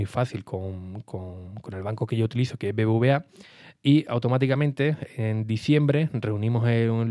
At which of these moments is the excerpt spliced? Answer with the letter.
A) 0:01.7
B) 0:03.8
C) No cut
C